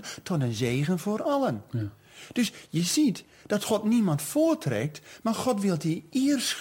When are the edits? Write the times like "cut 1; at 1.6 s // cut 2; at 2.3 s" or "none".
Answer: none